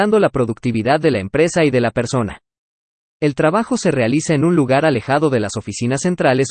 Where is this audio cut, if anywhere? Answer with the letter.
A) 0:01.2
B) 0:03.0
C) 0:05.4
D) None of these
B